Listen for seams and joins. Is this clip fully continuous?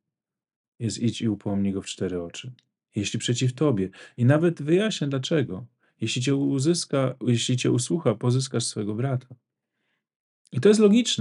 yes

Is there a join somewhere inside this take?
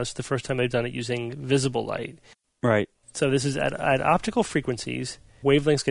no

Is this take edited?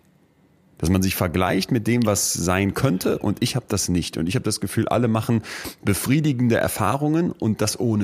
no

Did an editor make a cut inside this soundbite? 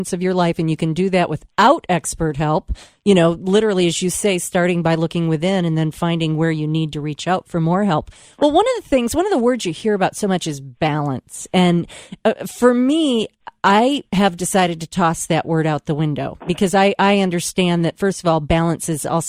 no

